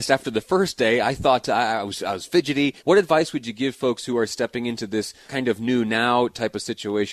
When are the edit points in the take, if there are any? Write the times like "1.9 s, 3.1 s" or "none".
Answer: 2.8 s, 5.3 s